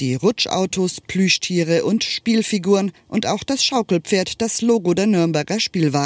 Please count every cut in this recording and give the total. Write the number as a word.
zero